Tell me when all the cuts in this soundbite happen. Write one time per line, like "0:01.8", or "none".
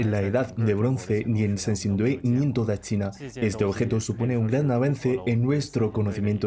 none